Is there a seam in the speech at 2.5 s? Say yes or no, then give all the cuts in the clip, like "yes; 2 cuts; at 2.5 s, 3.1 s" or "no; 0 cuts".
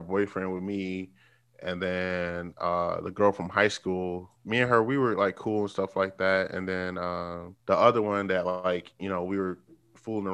no; 2 cuts; at 4.4 s, 7.6 s